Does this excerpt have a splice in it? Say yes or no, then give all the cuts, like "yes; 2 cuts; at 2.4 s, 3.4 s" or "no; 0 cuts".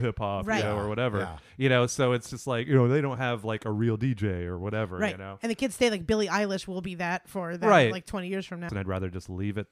yes; 1 cut; at 8.7 s